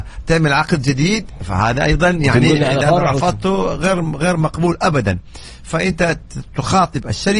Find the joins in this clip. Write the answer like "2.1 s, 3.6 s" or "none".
none